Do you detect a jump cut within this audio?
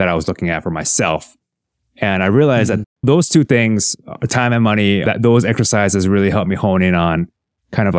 yes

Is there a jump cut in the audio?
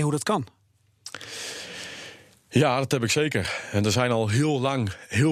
no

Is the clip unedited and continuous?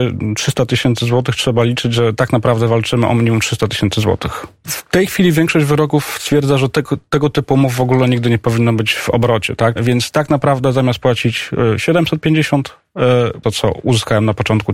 no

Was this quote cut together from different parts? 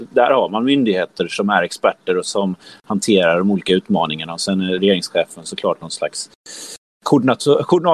yes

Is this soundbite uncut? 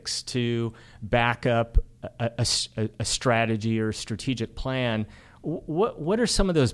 yes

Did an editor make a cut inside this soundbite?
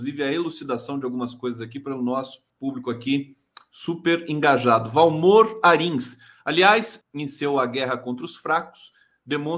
yes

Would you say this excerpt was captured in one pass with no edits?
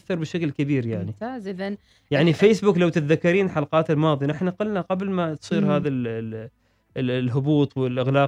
yes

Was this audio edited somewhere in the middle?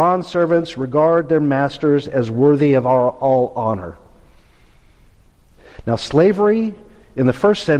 no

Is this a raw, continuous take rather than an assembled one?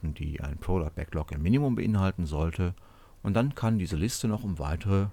yes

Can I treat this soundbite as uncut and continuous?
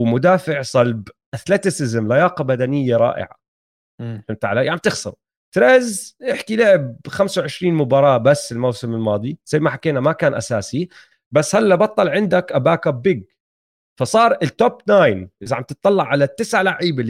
yes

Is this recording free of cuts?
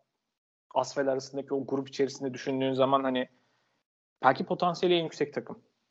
yes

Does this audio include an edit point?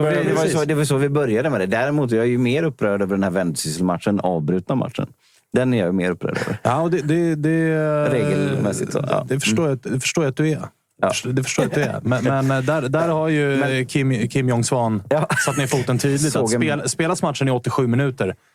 no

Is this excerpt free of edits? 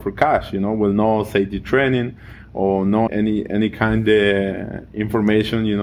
no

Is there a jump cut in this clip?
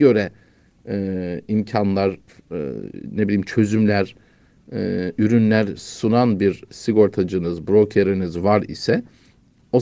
no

